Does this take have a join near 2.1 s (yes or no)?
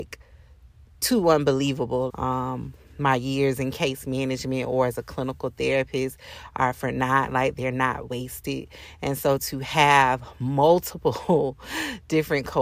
yes